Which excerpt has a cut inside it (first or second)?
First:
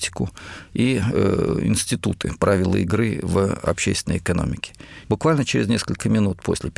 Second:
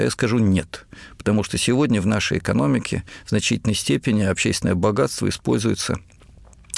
first